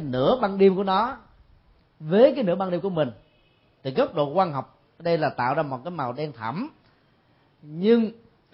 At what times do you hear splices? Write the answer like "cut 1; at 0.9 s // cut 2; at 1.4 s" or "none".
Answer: none